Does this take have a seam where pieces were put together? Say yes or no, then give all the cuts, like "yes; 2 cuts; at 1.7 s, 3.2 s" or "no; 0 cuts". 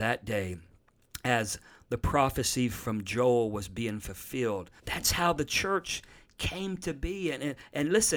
yes; 1 cut; at 4.8 s